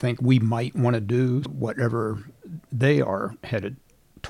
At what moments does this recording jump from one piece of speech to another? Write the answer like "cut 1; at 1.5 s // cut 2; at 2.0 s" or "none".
cut 1; at 1.4 s